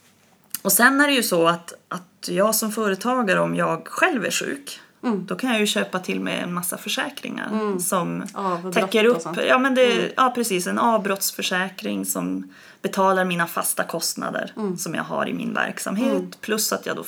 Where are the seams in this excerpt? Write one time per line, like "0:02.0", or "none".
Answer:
none